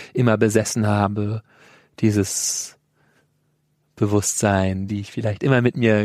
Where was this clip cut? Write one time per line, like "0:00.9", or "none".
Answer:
0:04.9